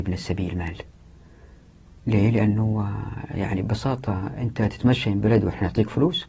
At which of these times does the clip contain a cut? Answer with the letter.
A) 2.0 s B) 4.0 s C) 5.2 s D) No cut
C